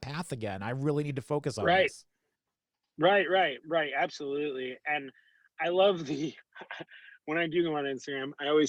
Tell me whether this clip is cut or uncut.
uncut